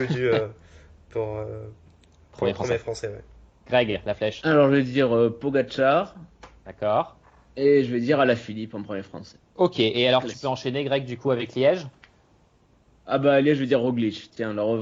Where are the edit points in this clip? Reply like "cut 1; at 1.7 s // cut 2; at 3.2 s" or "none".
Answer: cut 1; at 9.5 s